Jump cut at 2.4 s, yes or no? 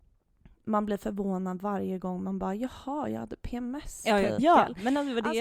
no